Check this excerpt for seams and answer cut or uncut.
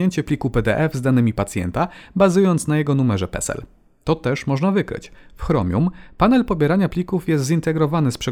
uncut